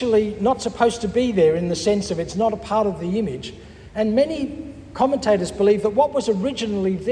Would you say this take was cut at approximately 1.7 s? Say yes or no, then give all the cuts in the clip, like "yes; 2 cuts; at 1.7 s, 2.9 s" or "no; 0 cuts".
no; 1 cut; at 3.9 s